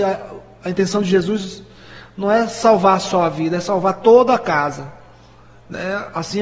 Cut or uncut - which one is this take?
uncut